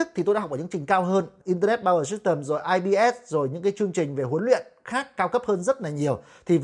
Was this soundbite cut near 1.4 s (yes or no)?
yes